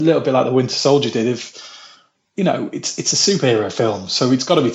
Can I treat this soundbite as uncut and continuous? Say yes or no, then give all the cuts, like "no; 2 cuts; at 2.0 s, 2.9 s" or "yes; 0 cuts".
yes; 0 cuts